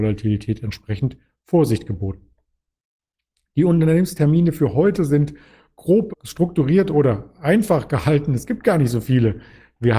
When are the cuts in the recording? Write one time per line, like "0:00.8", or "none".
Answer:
0:06.1